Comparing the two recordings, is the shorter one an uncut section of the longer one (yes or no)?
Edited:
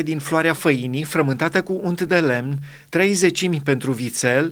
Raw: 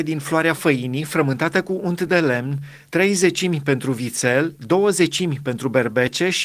yes